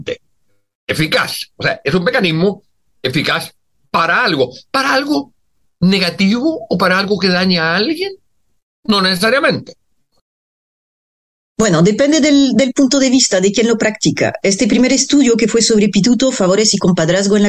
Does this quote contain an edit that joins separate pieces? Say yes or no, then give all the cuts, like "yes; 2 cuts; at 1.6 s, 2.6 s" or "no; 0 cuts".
no; 0 cuts